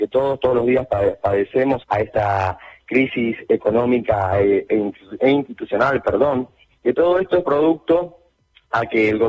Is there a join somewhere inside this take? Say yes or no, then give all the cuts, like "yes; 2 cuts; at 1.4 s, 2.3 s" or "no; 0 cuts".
yes; 2 cuts; at 1.8 s, 4.7 s